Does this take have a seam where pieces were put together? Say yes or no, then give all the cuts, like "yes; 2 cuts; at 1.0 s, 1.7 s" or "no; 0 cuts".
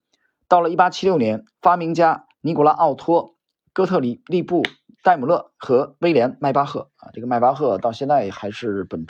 yes; 1 cut; at 2.3 s